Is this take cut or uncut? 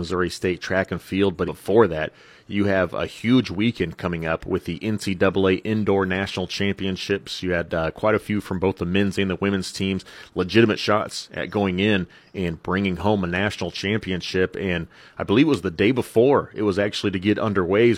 cut